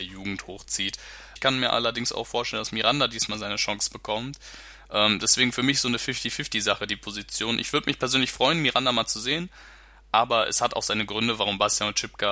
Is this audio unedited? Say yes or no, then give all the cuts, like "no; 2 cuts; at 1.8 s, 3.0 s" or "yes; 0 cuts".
no; 1 cut; at 1.4 s